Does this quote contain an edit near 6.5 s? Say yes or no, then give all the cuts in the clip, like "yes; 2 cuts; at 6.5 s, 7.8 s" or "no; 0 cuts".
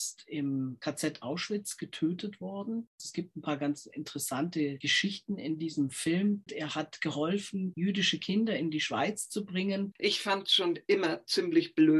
yes; 2 cuts; at 6.5 s, 9.9 s